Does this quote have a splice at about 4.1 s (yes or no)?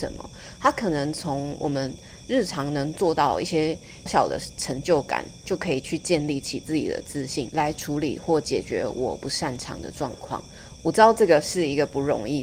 yes